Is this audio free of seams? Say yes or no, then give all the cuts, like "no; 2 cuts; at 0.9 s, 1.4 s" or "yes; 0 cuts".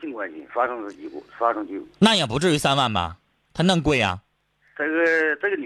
yes; 0 cuts